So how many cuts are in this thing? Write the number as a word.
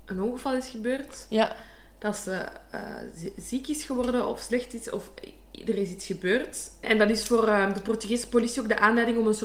one